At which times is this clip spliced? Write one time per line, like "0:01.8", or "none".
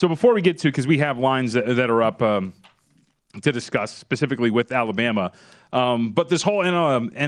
none